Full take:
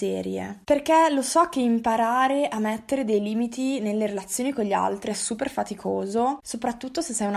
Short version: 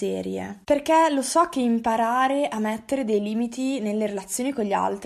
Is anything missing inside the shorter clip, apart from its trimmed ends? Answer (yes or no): no